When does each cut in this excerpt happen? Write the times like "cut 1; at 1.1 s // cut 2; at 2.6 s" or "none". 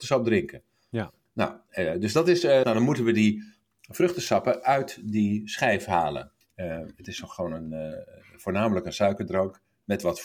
cut 1; at 2.6 s // cut 2; at 6.4 s